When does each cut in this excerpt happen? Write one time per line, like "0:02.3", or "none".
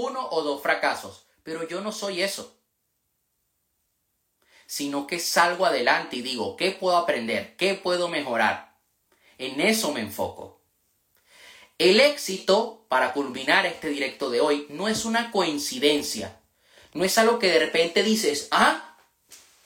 none

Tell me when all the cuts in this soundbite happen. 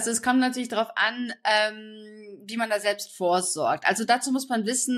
none

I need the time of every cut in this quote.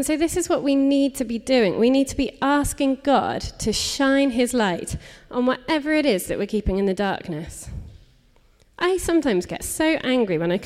none

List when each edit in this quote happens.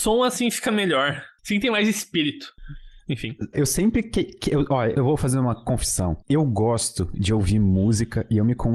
0:03.5
0:04.9

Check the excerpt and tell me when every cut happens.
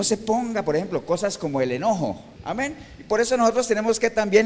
0:02.4

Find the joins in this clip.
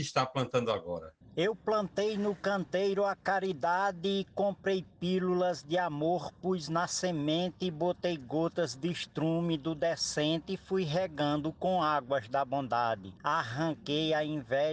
0:01.2
0:13.2

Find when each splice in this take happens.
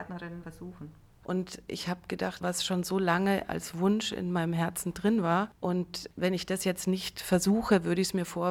0:01.2
0:02.4

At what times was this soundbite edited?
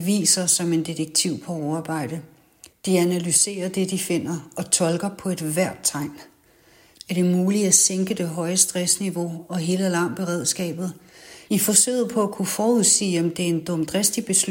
0:06.9
0:11.5

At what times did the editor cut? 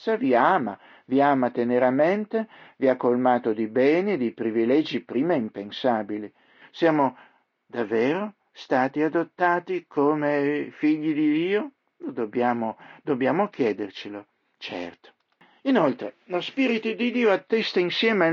0:06.6

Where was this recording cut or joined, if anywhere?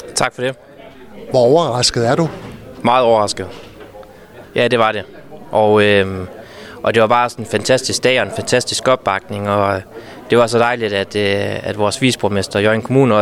0:04.4

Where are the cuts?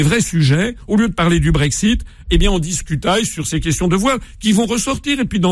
none

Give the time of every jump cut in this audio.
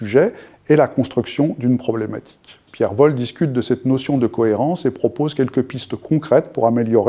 0:02.7

